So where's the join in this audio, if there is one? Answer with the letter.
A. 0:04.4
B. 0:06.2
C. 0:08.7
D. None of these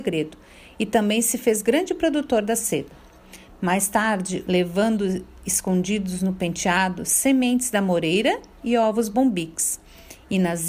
A